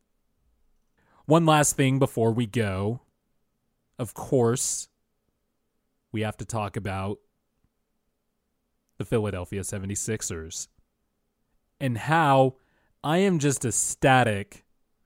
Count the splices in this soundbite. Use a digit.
0